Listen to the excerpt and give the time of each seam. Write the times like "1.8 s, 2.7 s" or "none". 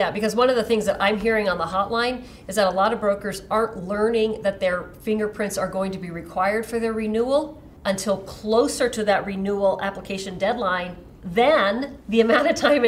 7.8 s